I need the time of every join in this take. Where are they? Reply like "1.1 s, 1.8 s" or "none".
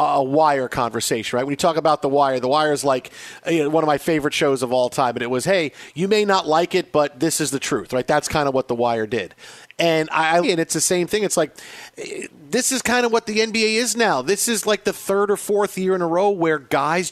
10.4 s